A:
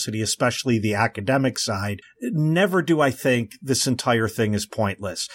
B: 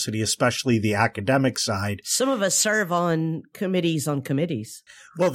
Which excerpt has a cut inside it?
A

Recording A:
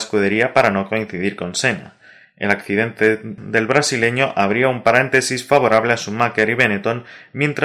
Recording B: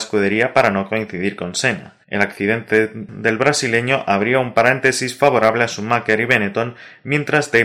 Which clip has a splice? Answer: B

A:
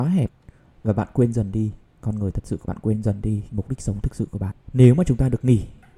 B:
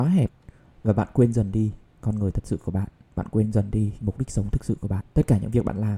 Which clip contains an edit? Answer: A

